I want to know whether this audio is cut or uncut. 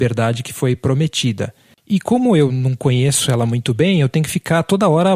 cut